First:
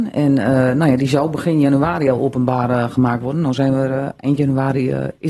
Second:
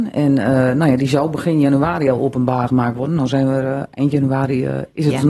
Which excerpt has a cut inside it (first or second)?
second